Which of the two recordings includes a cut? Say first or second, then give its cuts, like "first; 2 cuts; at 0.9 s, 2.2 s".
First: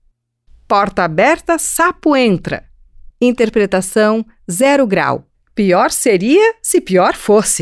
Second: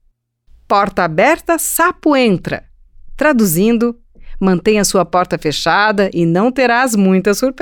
first; 2 cuts; at 3.1 s, 5.3 s